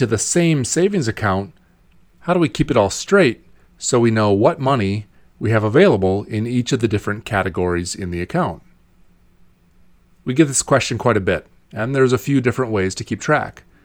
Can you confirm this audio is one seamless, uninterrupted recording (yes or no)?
yes